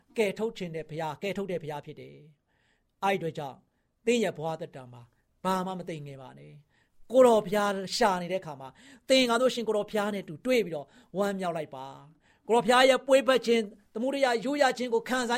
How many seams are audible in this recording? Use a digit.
0